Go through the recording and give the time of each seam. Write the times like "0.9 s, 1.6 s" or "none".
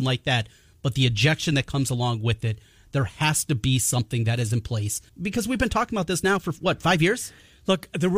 5.1 s